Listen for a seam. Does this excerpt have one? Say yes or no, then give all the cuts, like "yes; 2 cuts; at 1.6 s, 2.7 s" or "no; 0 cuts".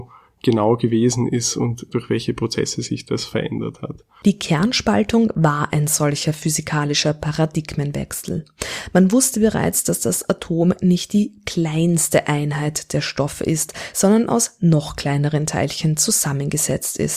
no; 0 cuts